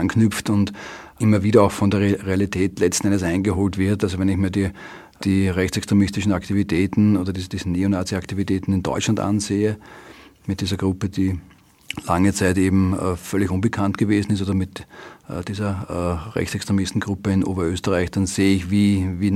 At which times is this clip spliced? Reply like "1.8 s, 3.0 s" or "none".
none